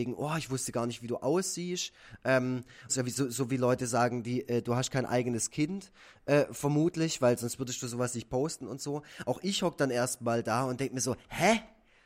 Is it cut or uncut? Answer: cut